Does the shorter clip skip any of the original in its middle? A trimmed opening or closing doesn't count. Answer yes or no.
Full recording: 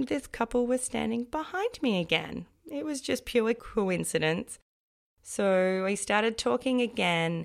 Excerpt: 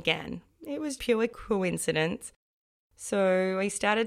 yes